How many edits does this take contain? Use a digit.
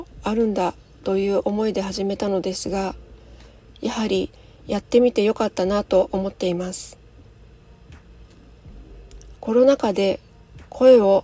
1